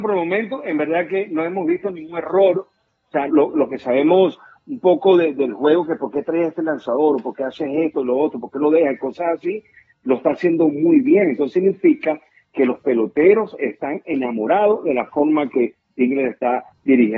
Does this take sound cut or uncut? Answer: cut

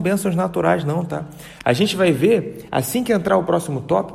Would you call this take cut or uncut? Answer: uncut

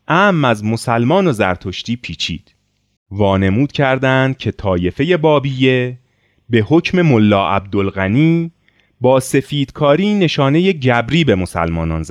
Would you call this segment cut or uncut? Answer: cut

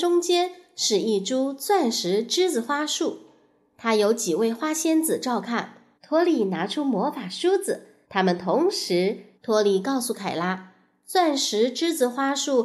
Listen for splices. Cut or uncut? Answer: cut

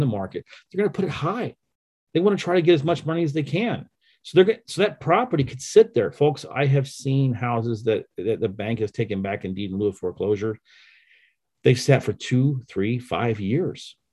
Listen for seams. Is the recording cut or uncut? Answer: uncut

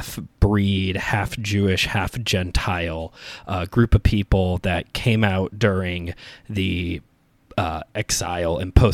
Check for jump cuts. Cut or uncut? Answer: uncut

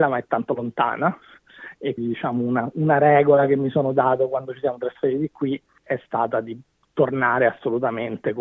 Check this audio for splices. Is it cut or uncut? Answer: cut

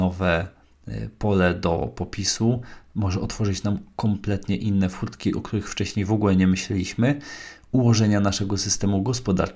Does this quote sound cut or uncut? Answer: uncut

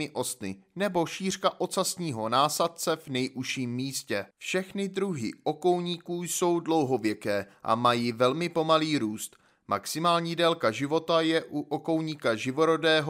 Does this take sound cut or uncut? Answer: cut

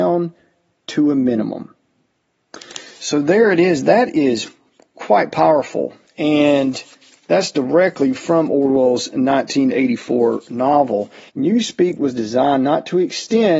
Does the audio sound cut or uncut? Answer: cut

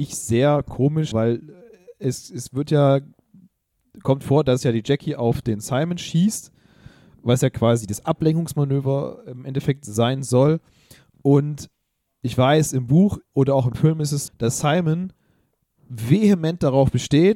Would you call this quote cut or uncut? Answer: cut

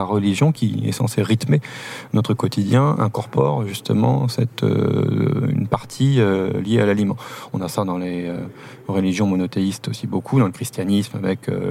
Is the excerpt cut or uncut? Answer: uncut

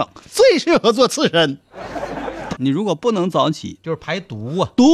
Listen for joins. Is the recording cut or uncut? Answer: cut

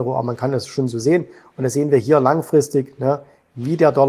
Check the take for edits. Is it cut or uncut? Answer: uncut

